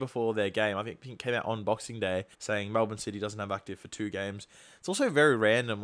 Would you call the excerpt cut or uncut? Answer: cut